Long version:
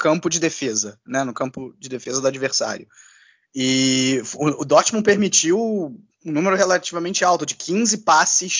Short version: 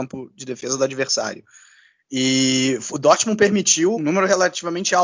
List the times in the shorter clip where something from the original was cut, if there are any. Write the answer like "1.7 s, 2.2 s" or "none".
2.9 s, 3.9 s